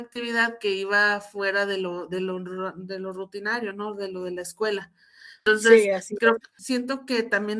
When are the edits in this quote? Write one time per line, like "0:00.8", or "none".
0:06.4

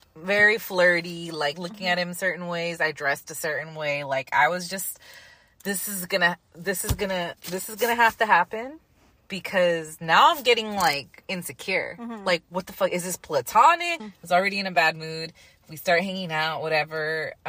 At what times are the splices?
0:14.0

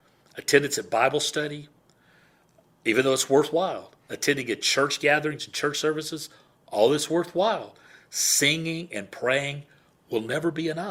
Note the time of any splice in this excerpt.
none

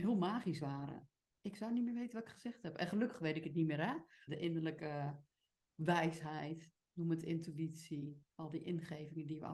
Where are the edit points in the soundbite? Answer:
0:04.3

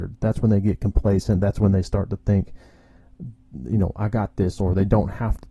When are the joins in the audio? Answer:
none

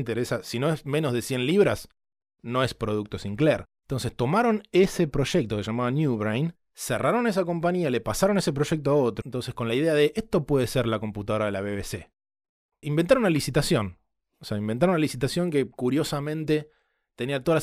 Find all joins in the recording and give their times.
0:09.2
0:12.8

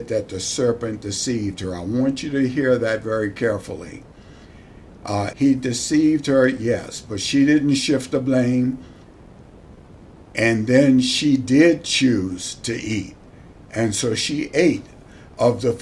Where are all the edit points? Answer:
0:05.3

